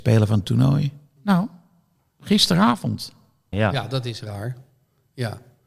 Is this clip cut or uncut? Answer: cut